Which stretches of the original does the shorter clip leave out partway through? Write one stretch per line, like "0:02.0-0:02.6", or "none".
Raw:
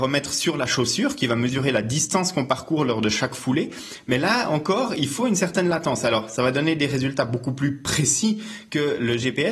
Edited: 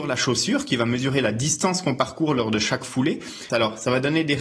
0:04.0-0:06.0